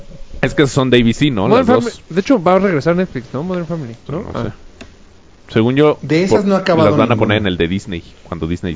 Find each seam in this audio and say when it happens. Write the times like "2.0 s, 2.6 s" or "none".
4.1 s